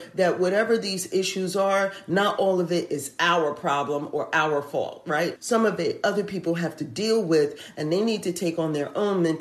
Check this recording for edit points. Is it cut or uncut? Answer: cut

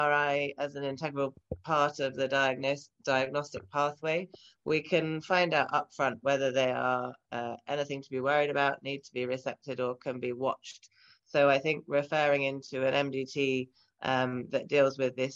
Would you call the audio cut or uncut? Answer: uncut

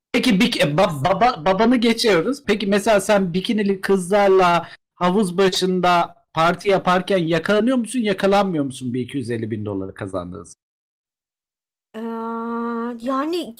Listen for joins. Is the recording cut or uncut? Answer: cut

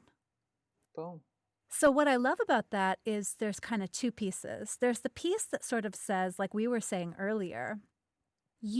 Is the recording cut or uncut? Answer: uncut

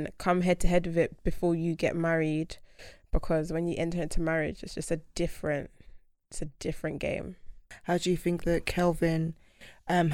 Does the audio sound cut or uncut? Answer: uncut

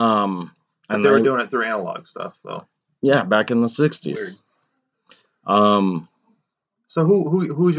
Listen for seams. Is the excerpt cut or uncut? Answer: uncut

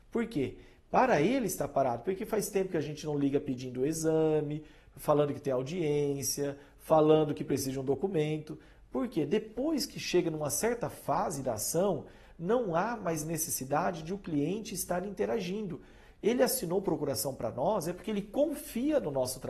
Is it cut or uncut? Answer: uncut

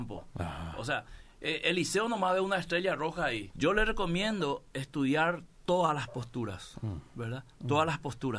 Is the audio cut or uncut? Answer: cut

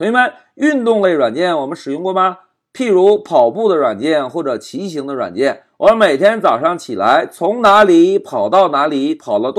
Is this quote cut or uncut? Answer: uncut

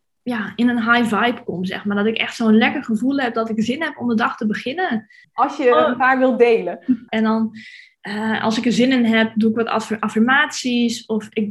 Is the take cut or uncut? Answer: cut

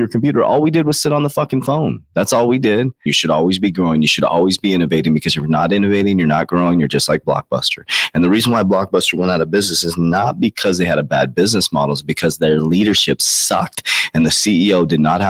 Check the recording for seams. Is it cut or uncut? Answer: cut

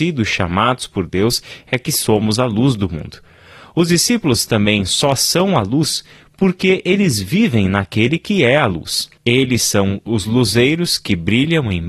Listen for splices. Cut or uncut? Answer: cut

